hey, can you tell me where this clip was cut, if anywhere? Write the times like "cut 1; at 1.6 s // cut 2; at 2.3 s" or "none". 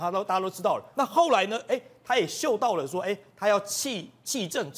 cut 1; at 0.9 s